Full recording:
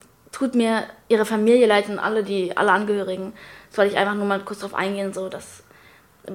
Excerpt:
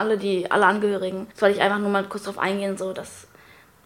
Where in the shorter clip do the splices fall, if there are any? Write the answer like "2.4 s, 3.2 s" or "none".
1.3 s